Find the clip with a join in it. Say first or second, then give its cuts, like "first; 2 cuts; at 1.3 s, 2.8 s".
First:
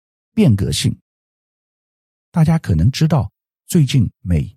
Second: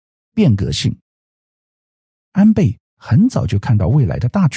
first; 1 cut; at 2.2 s